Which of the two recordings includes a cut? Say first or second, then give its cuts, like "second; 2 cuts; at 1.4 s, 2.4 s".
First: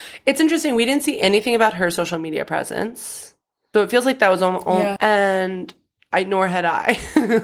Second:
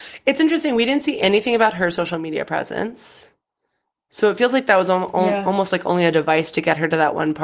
first; 2 cuts; at 3.7 s, 5.0 s